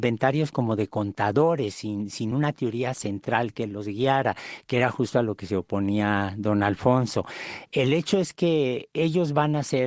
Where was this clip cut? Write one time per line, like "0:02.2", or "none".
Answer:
none